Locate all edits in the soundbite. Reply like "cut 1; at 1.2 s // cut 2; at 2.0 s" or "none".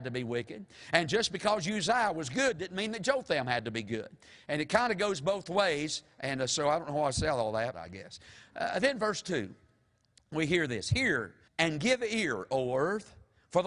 cut 1; at 7.7 s // cut 2; at 11.5 s